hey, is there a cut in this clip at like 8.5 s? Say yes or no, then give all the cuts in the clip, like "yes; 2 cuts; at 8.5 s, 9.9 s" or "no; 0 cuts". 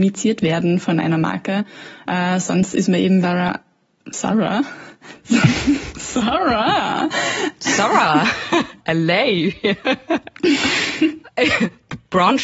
no; 1 cut; at 3.2 s